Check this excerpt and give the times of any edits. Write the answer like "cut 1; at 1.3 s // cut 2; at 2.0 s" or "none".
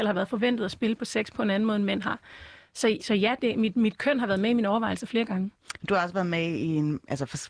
cut 1; at 3.0 s